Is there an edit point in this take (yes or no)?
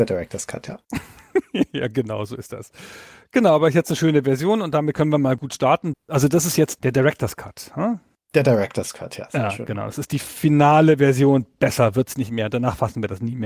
yes